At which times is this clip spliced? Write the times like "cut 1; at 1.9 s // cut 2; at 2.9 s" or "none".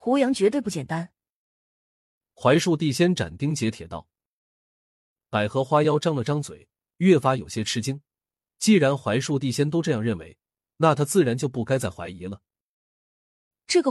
none